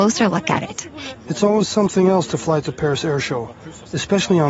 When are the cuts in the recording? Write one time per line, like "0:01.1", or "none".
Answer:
0:01.1